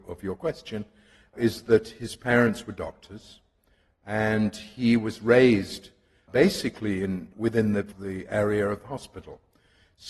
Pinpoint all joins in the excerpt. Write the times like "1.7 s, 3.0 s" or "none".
none